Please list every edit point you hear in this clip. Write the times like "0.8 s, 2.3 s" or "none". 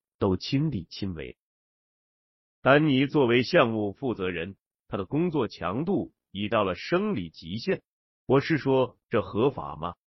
2.5 s, 8.1 s

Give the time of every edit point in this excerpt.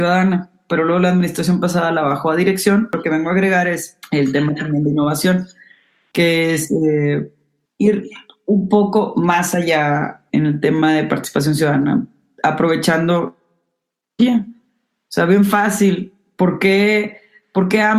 7.7 s, 10.3 s

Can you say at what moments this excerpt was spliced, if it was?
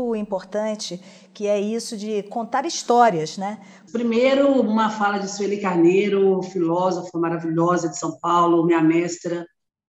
3.9 s

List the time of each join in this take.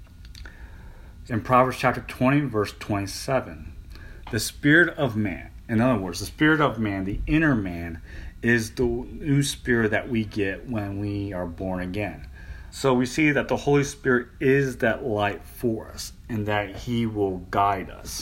1.3 s, 12.7 s

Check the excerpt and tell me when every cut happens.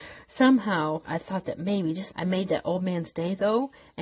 1.0 s, 2.1 s

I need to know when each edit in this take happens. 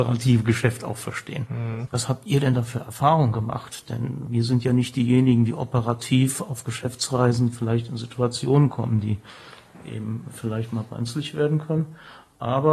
1.9 s

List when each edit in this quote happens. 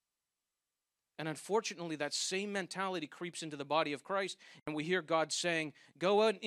none

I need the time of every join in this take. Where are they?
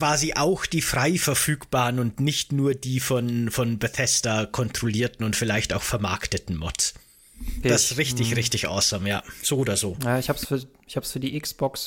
7.6 s

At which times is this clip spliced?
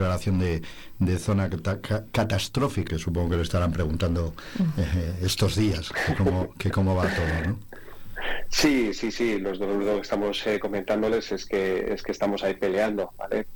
2.9 s

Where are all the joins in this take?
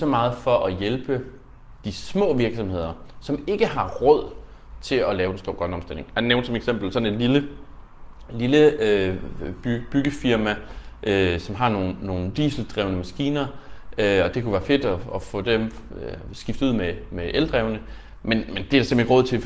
none

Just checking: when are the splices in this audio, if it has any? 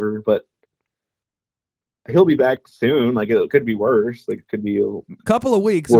none

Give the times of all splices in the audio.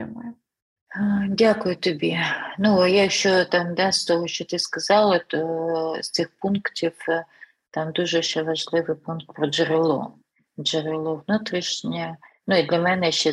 none

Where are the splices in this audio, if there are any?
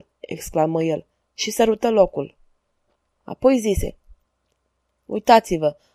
3.2 s

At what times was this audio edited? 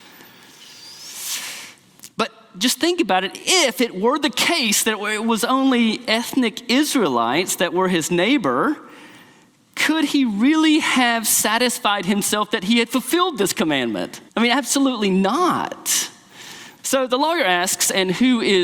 3.3 s, 14.3 s, 16.8 s

